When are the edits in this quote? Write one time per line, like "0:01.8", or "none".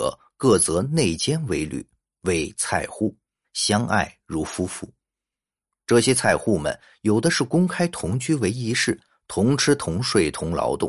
0:03.4

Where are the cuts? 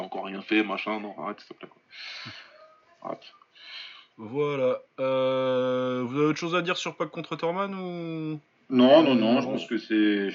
0:04.1

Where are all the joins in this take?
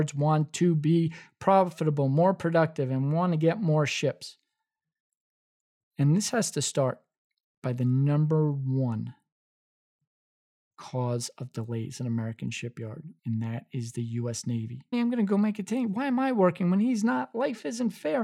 0:13.2
0:14.9

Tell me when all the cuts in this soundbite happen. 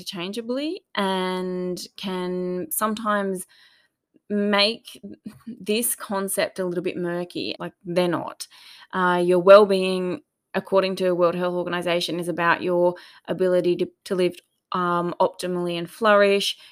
0:07.6
0:14.0

